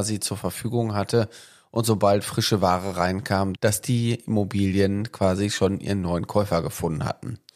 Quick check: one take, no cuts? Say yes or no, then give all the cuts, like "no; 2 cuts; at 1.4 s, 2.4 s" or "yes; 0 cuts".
no; 1 cut; at 3.5 s